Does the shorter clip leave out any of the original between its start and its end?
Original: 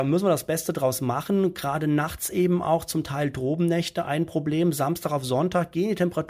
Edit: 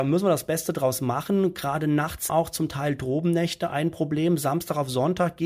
yes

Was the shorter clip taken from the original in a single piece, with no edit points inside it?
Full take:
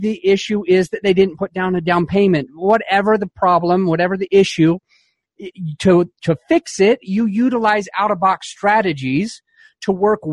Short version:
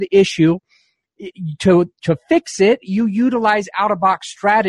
yes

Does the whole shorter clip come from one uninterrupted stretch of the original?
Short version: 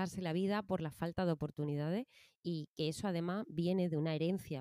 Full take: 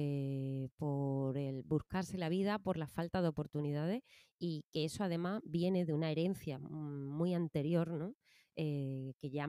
yes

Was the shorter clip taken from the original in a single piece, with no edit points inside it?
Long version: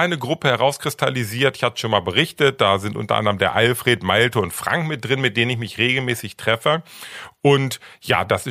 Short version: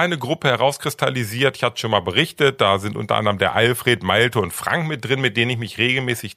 yes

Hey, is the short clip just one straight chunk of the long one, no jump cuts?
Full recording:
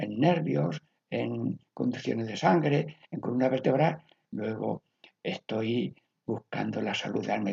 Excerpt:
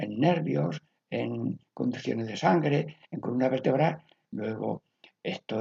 yes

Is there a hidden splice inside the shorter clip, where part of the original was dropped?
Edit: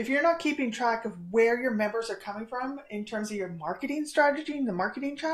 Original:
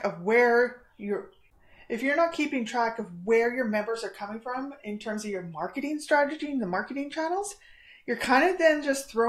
no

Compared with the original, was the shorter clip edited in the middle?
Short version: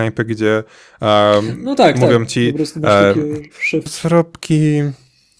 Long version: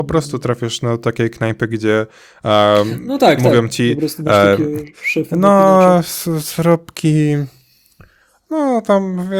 yes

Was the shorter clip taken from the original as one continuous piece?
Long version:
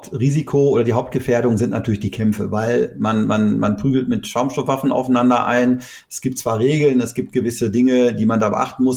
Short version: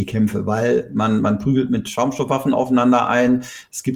no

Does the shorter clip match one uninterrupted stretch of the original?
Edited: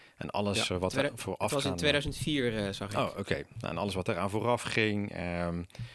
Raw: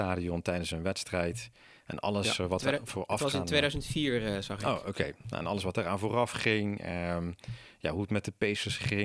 yes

